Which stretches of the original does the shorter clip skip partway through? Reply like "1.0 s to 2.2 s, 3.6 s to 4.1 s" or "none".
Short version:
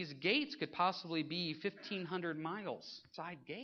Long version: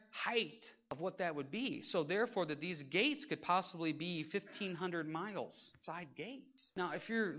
none